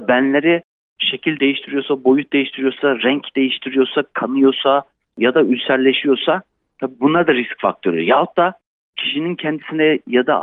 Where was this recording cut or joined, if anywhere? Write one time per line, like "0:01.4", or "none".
none